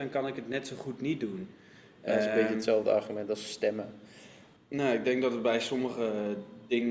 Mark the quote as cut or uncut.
cut